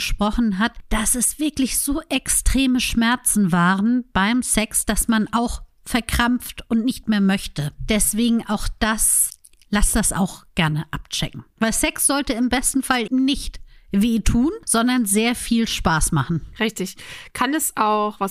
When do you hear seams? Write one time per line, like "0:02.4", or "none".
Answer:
0:11.5
0:13.1